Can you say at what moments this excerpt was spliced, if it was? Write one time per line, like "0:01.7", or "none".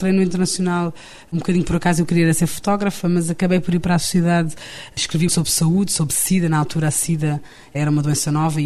0:05.3